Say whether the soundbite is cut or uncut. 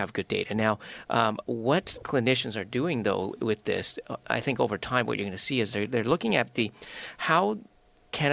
uncut